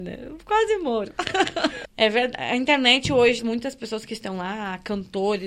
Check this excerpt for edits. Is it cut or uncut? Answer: cut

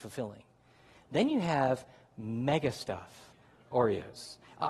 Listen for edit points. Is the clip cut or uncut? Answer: cut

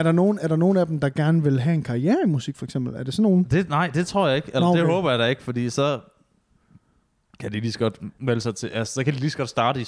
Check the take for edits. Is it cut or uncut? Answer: uncut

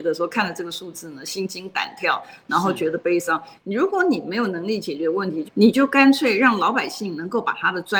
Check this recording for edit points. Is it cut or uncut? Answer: cut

